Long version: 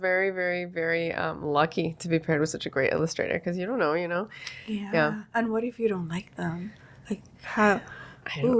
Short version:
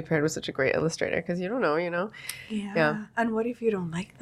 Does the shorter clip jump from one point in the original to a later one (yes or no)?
no